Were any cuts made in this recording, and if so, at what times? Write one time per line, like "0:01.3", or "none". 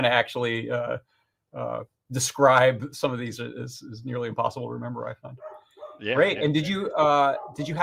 none

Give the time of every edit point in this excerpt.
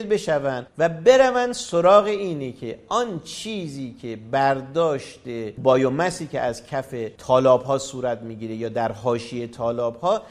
0:05.6

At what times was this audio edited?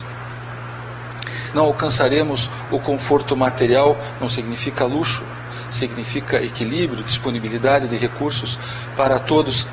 0:01.5

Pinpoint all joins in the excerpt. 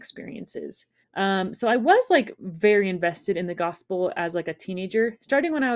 0:01.0

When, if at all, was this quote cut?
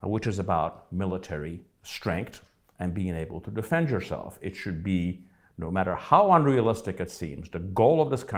none

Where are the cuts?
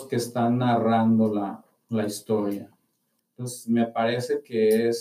0:03.2

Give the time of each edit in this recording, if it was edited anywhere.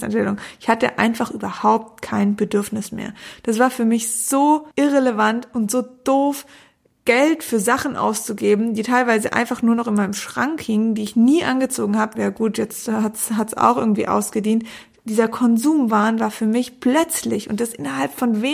0:04.7
0:12.1

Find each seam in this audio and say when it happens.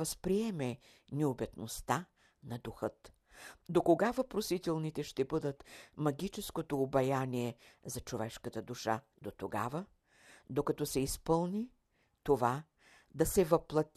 0:03.6
0:09.1

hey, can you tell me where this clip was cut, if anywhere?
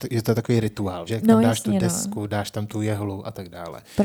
0:01.1

